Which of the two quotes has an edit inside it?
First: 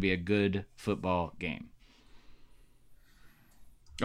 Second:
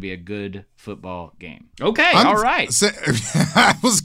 second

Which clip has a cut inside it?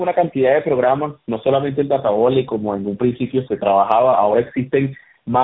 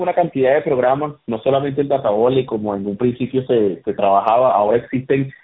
first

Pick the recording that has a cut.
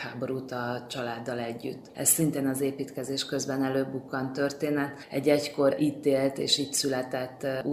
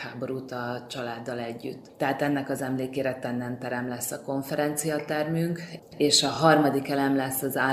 first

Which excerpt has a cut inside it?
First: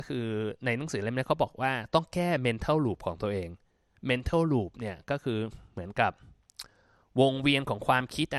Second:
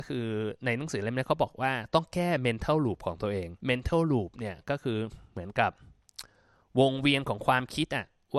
second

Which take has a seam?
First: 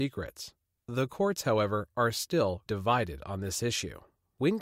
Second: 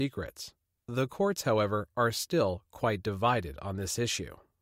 first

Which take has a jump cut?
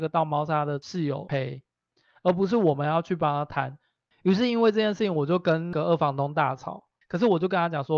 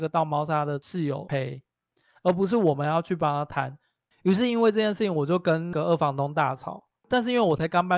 first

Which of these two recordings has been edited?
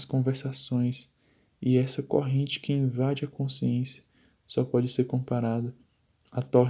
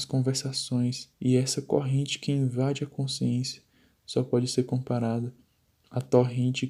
second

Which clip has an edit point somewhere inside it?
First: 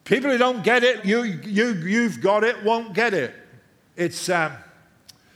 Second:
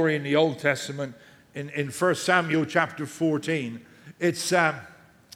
first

